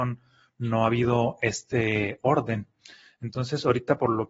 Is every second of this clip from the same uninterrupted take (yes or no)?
yes